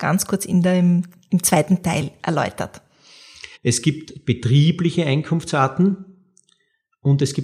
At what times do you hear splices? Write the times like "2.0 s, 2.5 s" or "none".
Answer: 3.5 s